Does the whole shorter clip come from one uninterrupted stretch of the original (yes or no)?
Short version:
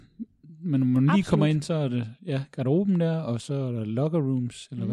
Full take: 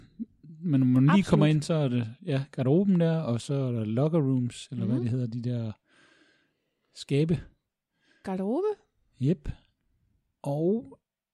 yes